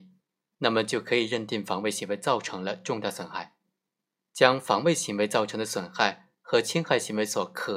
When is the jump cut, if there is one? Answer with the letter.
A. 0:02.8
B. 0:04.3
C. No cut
B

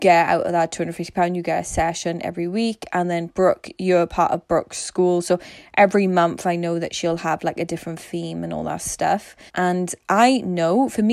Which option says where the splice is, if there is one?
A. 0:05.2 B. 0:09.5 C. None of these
B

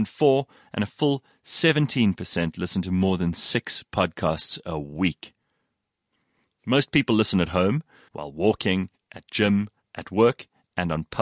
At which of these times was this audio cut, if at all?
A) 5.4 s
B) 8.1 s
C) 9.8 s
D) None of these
B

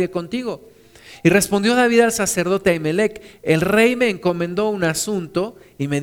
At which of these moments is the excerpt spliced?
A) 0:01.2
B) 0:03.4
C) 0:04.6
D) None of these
D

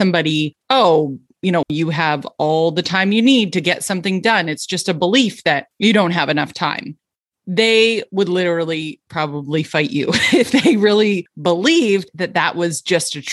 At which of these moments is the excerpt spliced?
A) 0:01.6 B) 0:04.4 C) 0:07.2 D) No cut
A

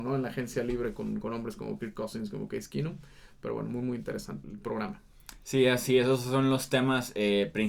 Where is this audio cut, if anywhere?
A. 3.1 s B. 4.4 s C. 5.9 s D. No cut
B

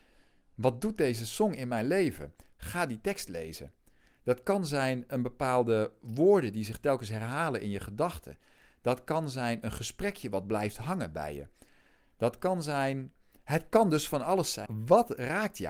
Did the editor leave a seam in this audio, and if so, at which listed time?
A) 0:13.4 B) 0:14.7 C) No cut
B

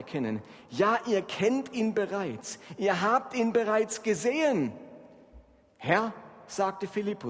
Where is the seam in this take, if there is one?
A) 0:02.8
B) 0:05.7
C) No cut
C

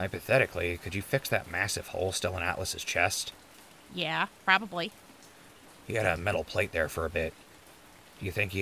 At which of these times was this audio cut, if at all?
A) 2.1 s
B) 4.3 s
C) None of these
B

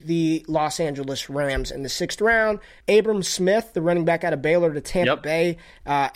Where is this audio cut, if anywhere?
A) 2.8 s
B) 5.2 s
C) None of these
A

